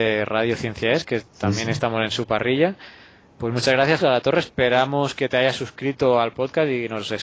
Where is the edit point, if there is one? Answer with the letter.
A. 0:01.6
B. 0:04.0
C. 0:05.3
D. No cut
B